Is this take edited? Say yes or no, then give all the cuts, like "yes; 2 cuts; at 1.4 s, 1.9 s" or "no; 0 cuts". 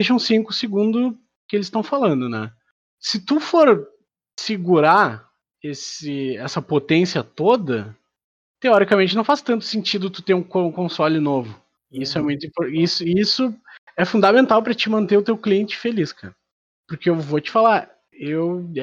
yes; 1 cut; at 11.7 s